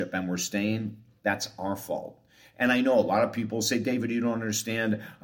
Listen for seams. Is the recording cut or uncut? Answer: uncut